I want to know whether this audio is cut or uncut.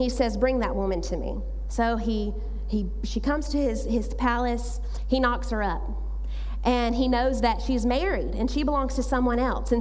uncut